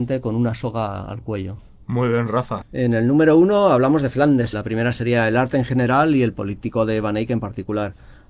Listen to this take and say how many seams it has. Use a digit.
2